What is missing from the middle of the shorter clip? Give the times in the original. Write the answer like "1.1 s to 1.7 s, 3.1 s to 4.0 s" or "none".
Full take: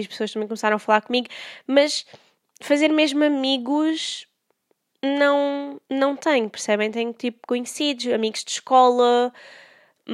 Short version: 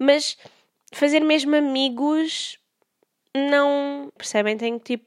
5.8 s to 6.5 s